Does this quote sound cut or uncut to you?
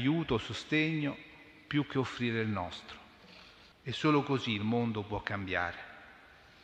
cut